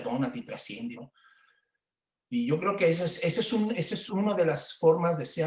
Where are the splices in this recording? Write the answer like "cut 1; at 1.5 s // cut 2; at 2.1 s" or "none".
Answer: cut 1; at 1.0 s // cut 2; at 4.1 s

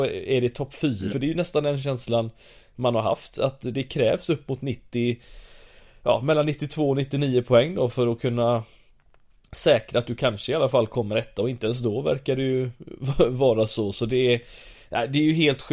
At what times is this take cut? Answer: cut 1; at 1.1 s

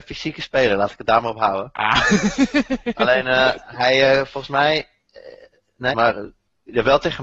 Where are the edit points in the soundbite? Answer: cut 1; at 5.9 s

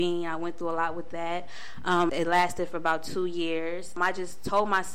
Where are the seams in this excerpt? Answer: cut 1; at 2.1 s // cut 2; at 4.0 s

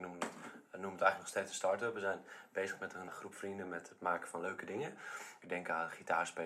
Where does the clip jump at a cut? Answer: cut 1; at 3.1 s // cut 2; at 5.4 s

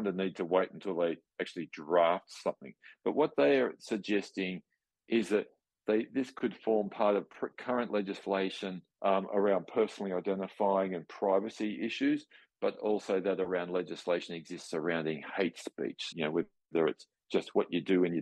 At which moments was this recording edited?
cut 1; at 8.9 s // cut 2; at 16.1 s

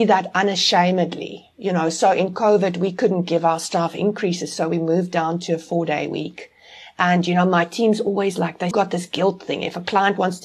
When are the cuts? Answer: cut 1; at 8.7 s

